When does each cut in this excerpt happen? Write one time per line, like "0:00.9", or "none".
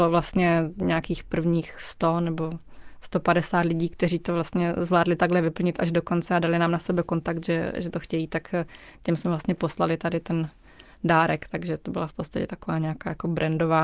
none